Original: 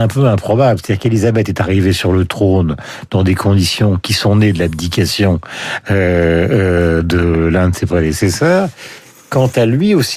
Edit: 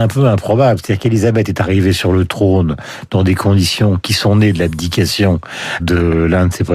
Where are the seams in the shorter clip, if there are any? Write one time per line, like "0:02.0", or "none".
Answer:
0:05.8